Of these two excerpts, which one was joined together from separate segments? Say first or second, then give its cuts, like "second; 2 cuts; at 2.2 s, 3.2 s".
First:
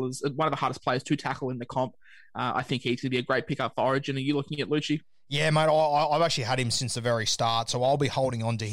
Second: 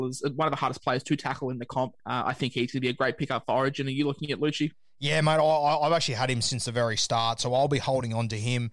second; 1 cut; at 2.0 s